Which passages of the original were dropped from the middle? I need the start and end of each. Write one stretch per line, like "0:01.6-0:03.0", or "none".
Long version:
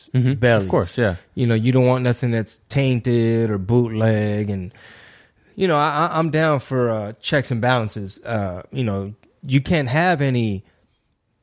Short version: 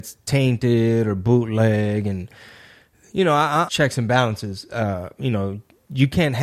0:06.1-0:07.2